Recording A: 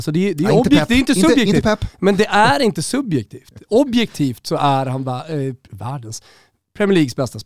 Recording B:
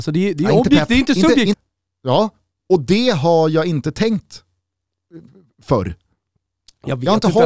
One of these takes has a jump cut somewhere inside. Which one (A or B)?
B